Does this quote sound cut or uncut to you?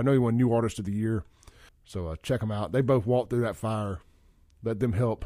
cut